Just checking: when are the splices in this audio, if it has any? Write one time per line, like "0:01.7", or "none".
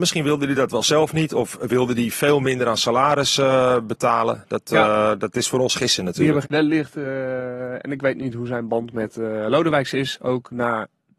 0:06.4